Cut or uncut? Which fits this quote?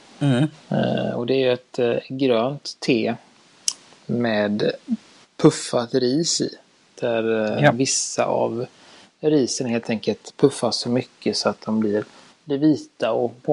uncut